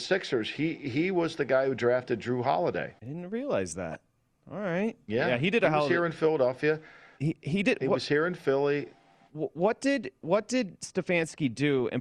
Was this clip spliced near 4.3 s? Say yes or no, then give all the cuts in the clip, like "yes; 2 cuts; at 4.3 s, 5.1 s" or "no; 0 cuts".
no; 1 cut; at 3.0 s